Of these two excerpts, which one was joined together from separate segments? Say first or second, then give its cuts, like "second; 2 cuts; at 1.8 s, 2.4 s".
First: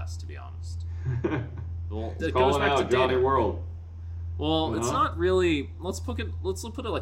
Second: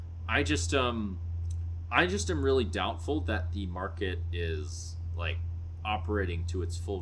first; 1 cut; at 2.2 s